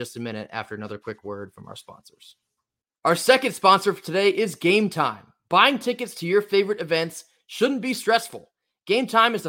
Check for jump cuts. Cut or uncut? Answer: uncut